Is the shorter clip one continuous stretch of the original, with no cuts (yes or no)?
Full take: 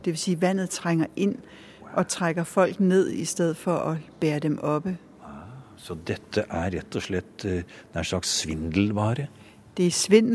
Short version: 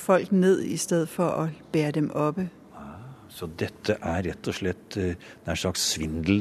yes